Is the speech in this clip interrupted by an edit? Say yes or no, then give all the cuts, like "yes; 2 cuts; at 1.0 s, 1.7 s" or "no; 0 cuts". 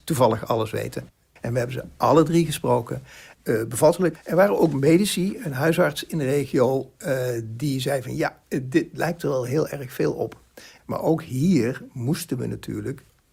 yes; 2 cuts; at 3.3 s, 10.8 s